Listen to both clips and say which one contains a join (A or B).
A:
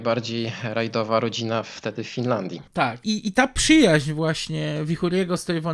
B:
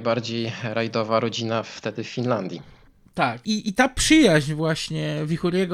A